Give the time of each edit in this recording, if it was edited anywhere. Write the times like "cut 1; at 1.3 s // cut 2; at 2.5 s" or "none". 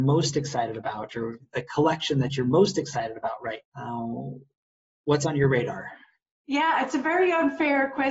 cut 1; at 3.6 s

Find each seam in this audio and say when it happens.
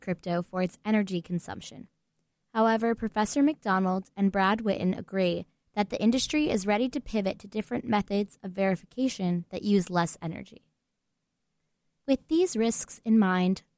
none

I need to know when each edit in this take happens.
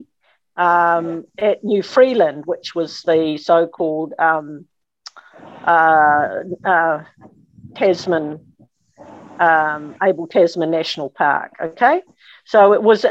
none

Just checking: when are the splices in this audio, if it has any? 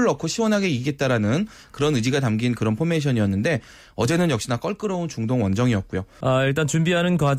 cut 1; at 6.2 s

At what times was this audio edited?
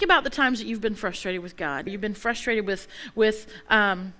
cut 1; at 1.9 s

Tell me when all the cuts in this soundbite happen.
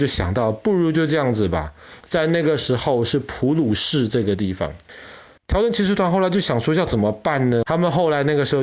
cut 1; at 2.0 s // cut 2; at 5.4 s // cut 3; at 7.6 s

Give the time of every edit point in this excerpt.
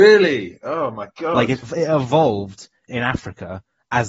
cut 1; at 1.6 s // cut 2; at 2.9 s

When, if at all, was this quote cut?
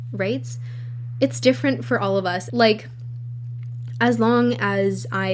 cut 1; at 2.5 s

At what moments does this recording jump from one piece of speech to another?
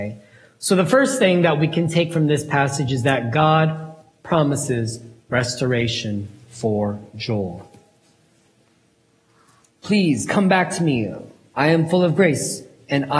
none

